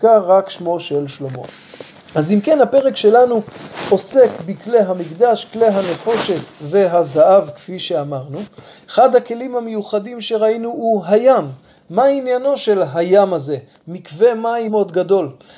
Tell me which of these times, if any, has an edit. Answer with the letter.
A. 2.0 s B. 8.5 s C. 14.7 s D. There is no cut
C